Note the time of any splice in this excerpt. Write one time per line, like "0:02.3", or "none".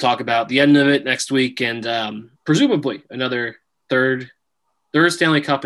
0:02.4